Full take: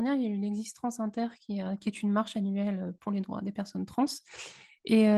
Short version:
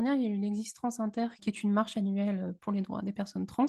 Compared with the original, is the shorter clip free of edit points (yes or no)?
no